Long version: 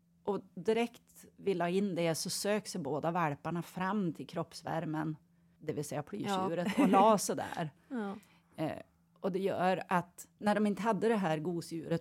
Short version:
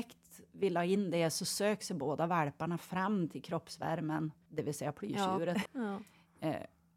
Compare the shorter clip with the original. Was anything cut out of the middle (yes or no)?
yes